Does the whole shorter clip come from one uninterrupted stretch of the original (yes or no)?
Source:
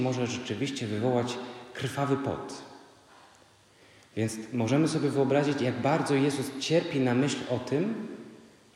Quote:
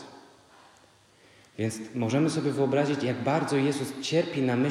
yes